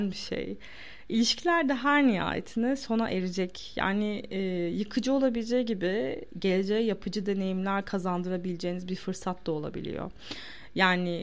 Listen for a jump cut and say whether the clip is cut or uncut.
uncut